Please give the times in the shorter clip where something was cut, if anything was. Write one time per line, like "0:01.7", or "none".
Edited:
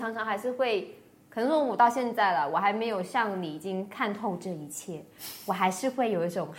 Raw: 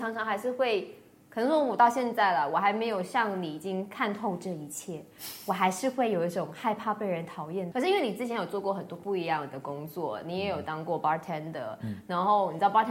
none